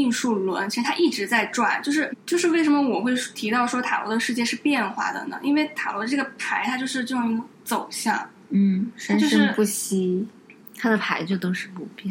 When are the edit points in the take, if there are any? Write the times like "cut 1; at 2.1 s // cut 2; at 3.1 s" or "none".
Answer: cut 1; at 2.1 s